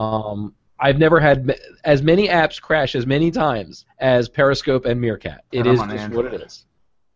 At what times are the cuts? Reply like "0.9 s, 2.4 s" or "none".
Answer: 5.5 s